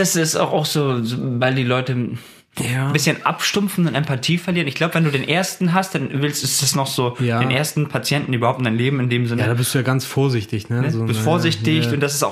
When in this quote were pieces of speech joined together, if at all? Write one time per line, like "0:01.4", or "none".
none